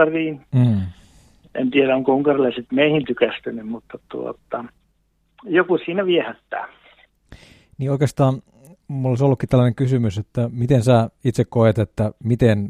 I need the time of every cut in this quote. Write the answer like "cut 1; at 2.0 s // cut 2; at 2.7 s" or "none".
none